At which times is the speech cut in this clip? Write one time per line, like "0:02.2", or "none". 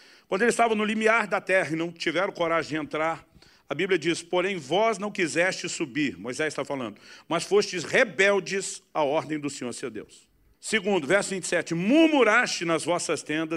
0:10.5